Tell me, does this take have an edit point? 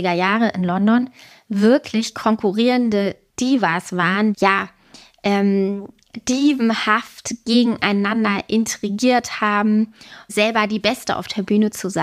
yes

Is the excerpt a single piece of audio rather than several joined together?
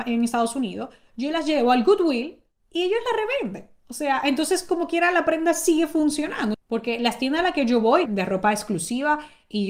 no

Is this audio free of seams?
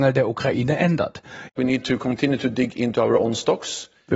no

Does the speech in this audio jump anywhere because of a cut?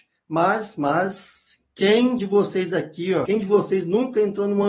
yes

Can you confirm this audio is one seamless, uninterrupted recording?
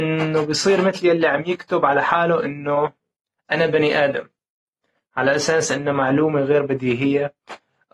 yes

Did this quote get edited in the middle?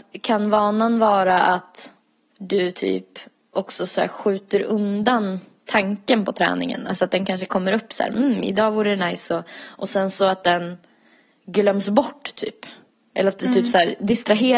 no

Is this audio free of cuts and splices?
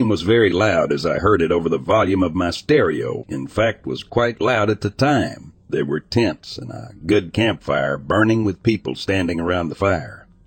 no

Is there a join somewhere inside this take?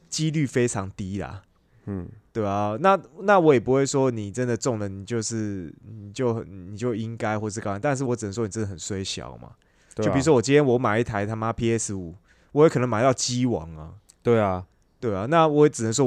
no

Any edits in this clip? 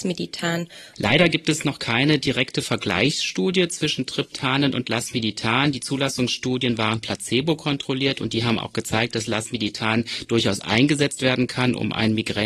yes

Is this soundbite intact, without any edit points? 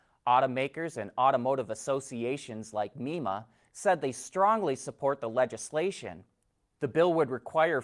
yes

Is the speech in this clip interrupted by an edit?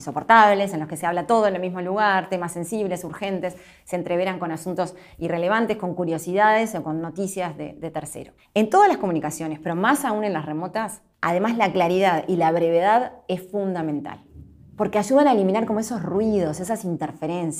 yes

